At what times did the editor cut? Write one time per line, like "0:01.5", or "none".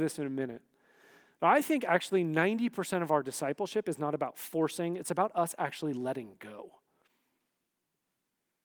0:05.0